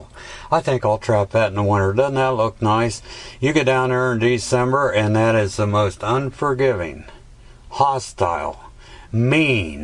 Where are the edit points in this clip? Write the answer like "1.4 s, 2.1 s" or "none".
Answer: none